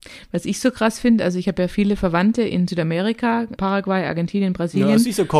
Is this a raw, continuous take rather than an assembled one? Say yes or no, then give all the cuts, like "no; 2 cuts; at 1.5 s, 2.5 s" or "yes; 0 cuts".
no; 1 cut; at 3.6 s